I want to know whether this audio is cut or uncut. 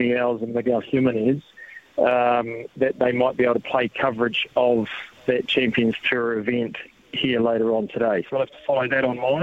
cut